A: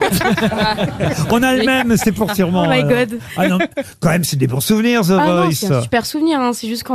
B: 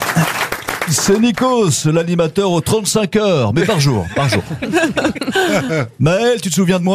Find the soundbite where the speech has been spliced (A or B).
A